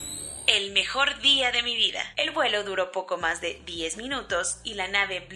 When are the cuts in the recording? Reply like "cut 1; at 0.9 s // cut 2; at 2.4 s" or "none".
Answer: cut 1; at 2.1 s